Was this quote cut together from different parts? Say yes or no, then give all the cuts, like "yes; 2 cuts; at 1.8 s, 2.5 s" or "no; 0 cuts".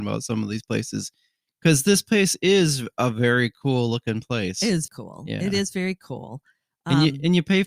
yes; 1 cut; at 4.9 s